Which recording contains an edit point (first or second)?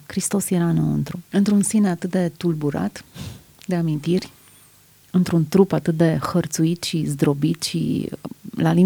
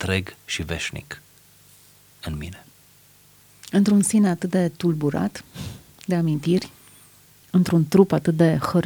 first